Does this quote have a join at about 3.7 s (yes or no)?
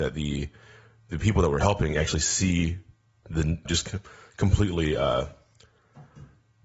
yes